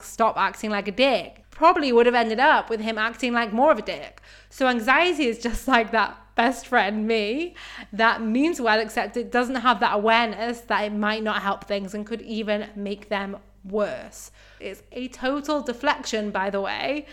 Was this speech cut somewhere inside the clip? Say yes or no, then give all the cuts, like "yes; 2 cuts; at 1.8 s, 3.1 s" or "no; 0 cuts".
yes; 2 cuts; at 1.4 s, 14.6 s